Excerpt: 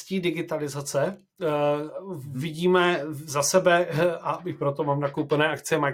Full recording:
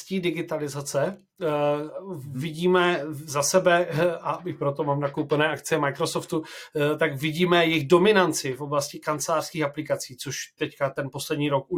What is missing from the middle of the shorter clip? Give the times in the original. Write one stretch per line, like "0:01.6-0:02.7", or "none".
none